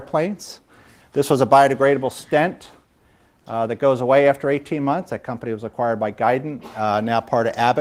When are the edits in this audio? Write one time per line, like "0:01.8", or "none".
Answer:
0:01.0